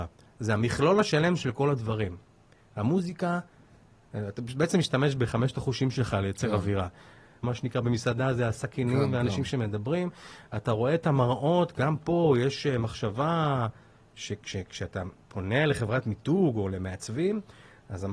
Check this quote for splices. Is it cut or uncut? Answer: cut